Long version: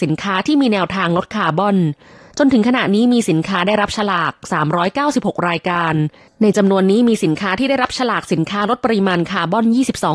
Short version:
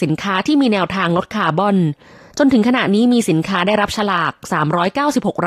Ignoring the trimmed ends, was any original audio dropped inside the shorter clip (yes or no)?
no